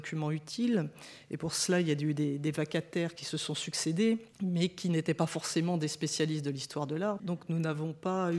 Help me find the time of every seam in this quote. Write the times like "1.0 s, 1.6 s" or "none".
4.3 s, 7.2 s